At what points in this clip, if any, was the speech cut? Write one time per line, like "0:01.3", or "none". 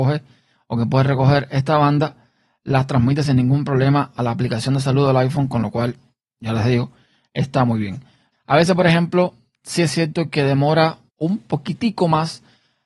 0:08.3
0:11.1